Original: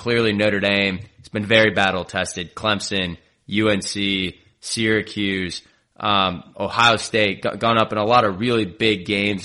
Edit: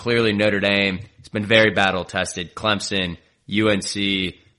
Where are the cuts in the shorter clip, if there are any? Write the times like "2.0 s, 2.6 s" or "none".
none